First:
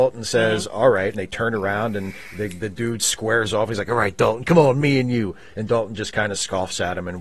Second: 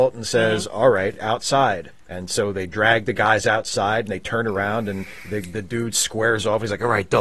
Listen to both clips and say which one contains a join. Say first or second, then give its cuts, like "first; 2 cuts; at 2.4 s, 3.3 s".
first; 1 cut; at 1.1 s